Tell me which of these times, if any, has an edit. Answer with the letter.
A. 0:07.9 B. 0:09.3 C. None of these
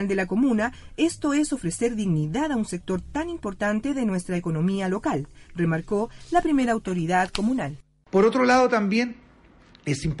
C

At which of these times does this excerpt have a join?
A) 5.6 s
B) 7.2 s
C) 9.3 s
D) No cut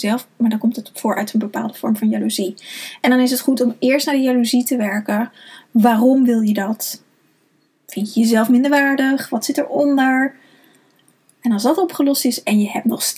D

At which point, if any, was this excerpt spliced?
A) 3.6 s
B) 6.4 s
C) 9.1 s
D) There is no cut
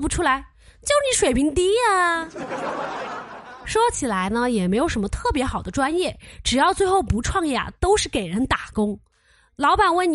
D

